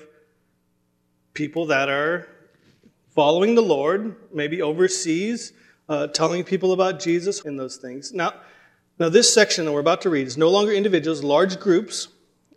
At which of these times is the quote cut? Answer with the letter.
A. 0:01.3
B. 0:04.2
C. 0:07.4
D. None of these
C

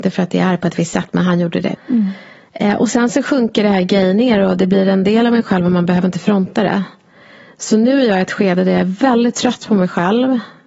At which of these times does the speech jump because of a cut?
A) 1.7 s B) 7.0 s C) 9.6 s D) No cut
A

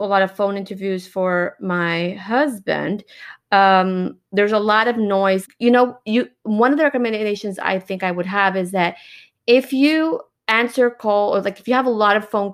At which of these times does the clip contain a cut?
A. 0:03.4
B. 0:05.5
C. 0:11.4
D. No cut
B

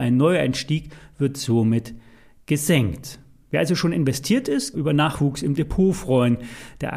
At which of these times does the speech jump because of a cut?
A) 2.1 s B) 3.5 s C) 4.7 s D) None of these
C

